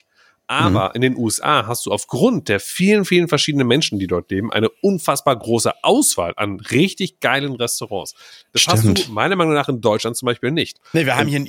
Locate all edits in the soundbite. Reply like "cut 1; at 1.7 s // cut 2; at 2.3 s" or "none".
none